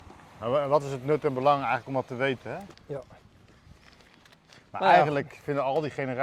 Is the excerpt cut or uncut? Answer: cut